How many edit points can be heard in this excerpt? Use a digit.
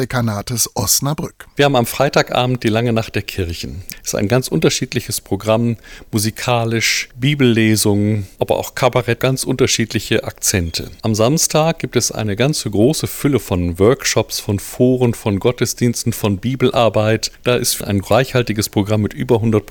1